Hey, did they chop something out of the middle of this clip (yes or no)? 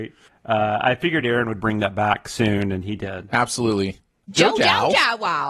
yes